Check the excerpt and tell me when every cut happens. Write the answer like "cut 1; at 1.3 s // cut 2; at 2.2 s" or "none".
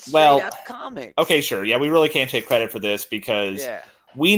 none